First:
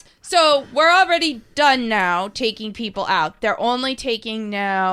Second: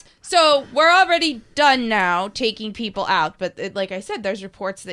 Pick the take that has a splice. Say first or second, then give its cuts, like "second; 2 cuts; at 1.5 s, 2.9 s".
second; 1 cut; at 3.4 s